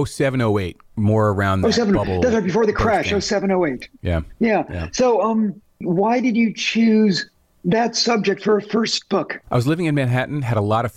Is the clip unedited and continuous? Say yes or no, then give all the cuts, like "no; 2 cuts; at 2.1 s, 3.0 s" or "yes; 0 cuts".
no; 1 cut; at 9.4 s